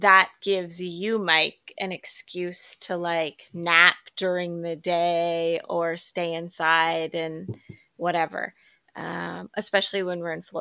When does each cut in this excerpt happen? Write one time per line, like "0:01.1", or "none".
none